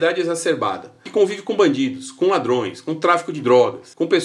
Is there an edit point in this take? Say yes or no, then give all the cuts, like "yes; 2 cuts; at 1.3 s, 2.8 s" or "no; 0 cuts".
no; 0 cuts